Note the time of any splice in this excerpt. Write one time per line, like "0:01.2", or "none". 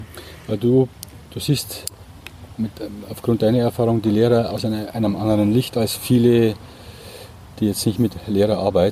none

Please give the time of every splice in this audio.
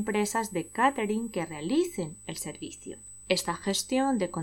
none

